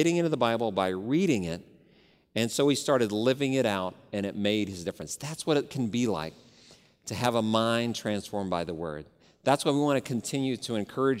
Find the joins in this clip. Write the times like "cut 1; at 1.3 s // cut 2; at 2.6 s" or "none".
none